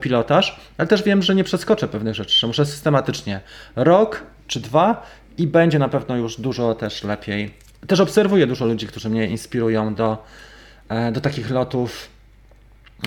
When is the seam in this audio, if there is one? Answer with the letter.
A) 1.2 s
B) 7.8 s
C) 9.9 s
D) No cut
D